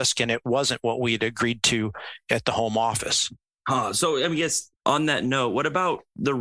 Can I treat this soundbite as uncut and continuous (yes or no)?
no